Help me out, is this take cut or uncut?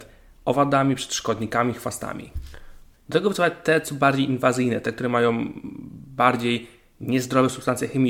cut